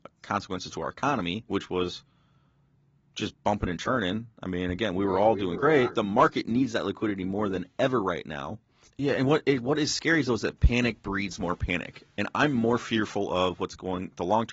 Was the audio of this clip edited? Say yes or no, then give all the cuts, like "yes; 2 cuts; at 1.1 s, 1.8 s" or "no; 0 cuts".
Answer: yes; 2 cuts; at 5.9 s, 8.9 s